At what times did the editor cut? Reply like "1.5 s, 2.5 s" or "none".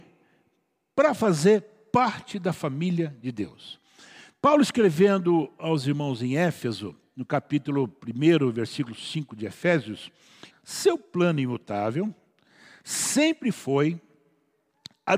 10.5 s